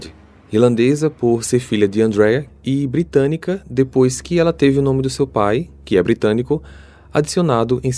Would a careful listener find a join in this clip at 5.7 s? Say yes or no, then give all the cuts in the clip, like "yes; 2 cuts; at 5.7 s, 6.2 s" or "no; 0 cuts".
no; 1 cut; at 2.5 s